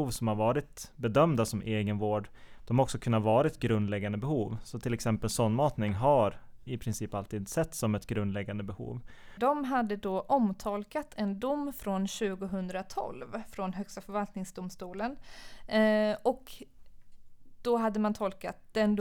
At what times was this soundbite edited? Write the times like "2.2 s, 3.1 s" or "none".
6.7 s, 9.4 s